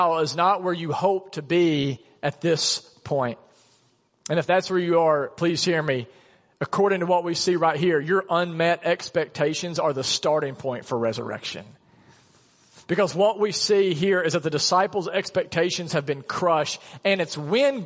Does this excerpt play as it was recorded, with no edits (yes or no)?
yes